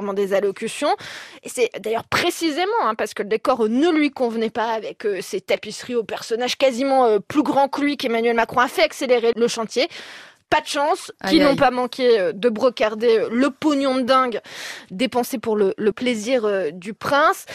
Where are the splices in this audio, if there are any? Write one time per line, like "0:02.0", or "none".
0:09.3
0:11.1
0:15.9